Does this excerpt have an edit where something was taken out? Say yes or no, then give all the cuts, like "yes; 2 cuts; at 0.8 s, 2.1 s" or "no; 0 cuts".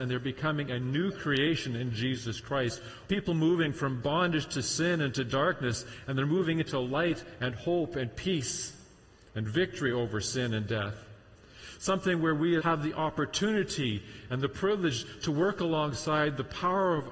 yes; 2 cuts; at 3.1 s, 12.6 s